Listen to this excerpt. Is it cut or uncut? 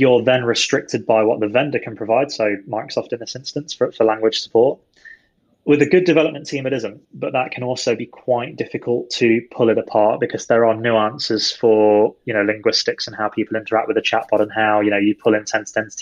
uncut